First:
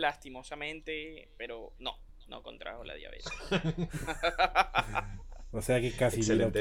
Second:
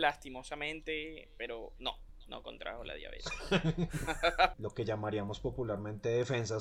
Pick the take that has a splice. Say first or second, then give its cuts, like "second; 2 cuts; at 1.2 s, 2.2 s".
second; 1 cut; at 4.5 s